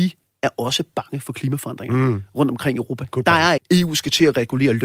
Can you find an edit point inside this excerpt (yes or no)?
yes